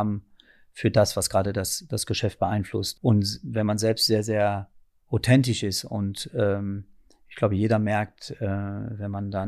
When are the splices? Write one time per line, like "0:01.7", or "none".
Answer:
0:02.9